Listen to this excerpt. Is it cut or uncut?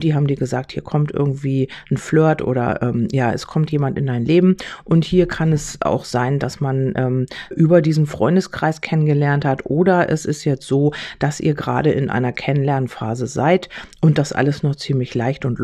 cut